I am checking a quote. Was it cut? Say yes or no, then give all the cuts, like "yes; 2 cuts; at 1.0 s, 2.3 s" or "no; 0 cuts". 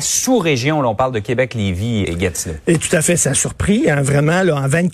yes; 1 cut; at 2.0 s